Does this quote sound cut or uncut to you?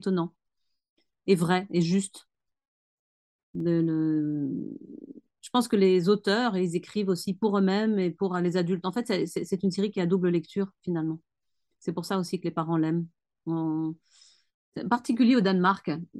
uncut